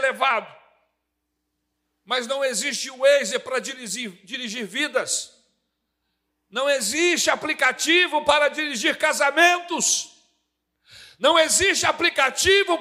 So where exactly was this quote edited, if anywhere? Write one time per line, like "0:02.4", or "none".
none